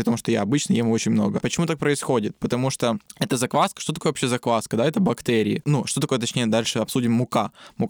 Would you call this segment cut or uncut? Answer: uncut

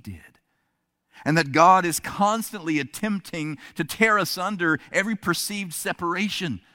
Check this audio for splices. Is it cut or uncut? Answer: uncut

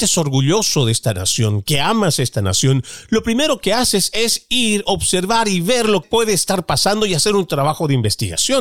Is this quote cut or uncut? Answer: cut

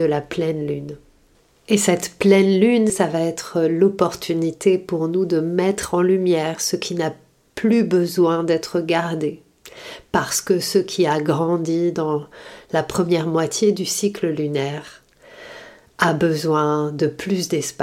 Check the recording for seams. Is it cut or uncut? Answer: cut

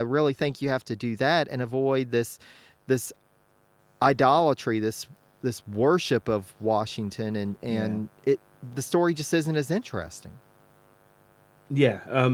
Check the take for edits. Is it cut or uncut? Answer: uncut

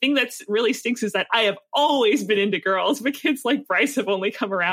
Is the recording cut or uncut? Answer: uncut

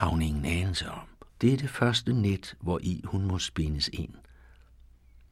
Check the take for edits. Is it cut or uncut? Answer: cut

